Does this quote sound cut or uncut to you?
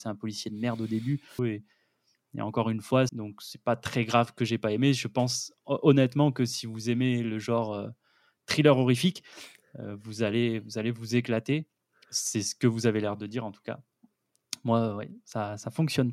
cut